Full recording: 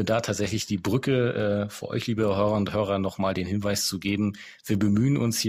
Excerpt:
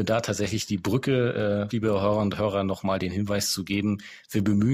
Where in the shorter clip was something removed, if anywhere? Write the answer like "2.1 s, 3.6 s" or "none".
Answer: 1.7 s